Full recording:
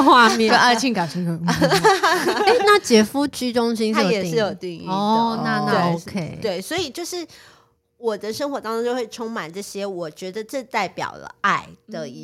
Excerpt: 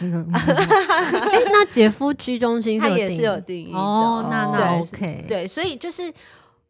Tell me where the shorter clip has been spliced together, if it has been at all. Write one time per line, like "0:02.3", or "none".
none